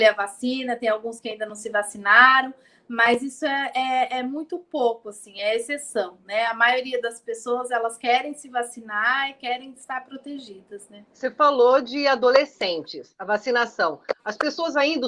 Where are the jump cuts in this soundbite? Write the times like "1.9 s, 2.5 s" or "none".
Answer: 11.1 s